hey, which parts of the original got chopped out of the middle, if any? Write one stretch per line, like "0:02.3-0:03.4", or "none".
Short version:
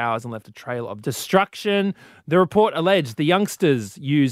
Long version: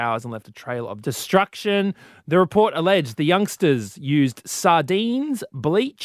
none